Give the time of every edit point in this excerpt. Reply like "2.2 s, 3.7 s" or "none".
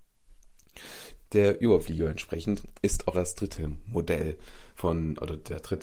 1.2 s, 3.1 s